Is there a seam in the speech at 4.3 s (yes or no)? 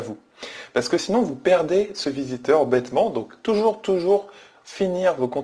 no